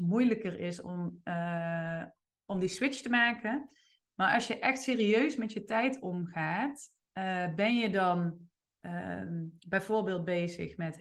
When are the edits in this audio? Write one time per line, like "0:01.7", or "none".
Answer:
none